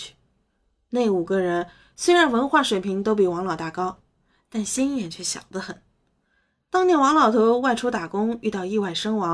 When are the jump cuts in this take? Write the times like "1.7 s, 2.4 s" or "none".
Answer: none